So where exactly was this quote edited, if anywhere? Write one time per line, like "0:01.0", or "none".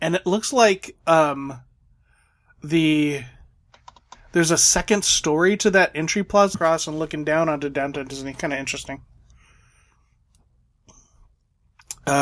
0:06.5